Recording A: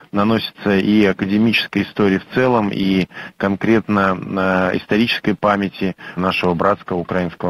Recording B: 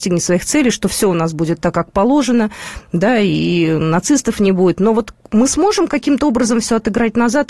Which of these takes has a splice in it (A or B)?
A